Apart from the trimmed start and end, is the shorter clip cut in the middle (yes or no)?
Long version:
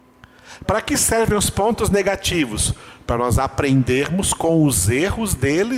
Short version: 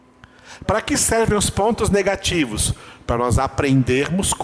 no